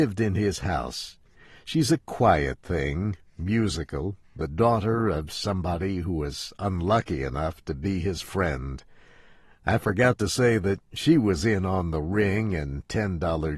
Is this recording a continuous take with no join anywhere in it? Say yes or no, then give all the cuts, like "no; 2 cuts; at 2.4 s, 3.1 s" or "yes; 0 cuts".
yes; 0 cuts